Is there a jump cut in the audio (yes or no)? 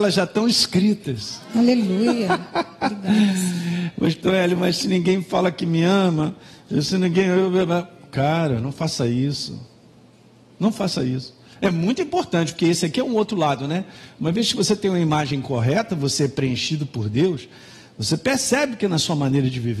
no